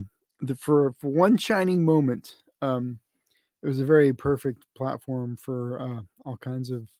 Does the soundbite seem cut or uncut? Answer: uncut